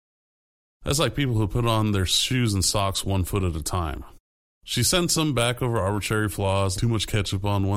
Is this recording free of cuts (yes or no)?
no